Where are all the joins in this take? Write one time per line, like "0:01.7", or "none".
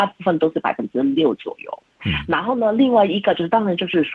0:02.0